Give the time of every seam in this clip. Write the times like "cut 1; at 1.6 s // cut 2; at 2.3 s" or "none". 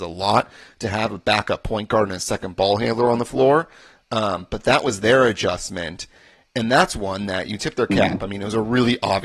none